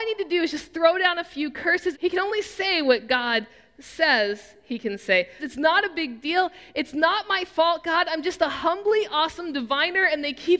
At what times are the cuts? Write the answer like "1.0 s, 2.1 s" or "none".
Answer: 1.9 s, 5.4 s